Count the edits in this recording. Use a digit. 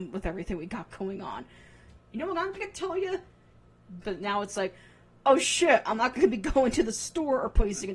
2